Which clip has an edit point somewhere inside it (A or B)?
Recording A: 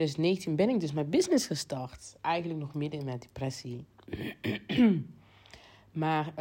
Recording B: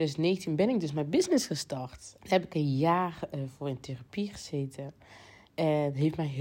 B